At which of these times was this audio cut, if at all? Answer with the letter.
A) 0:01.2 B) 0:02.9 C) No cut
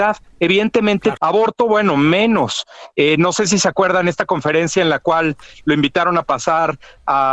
A